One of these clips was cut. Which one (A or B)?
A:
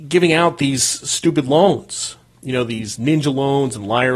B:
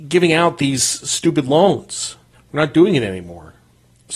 B